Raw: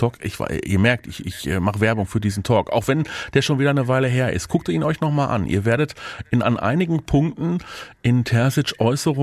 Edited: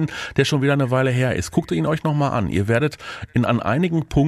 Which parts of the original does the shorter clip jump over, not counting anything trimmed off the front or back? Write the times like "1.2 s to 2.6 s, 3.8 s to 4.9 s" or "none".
none